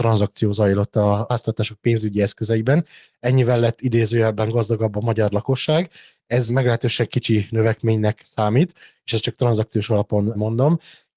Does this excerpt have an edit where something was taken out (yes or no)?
no